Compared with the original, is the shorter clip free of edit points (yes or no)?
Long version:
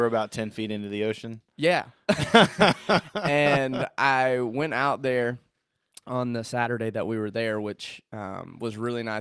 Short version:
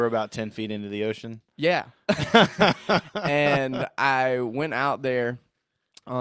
yes